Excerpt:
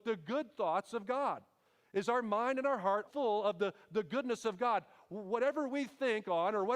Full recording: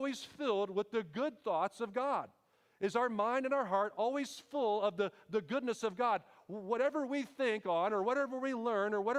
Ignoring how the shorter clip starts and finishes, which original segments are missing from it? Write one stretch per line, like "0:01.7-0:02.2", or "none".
0:03.9-0:04.5